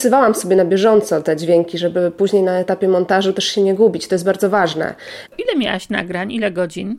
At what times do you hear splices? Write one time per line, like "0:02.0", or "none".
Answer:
0:05.3